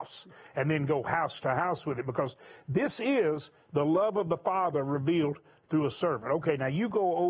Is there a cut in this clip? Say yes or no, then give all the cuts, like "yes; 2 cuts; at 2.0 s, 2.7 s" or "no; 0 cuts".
no; 0 cuts